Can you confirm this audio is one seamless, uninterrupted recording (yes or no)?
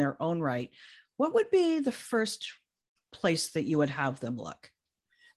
yes